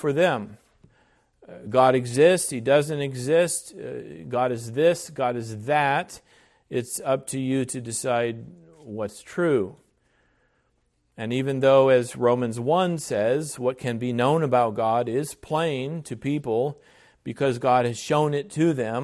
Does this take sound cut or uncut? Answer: uncut